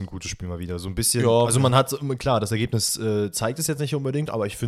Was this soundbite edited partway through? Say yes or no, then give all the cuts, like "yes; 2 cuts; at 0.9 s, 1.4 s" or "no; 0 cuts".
no; 0 cuts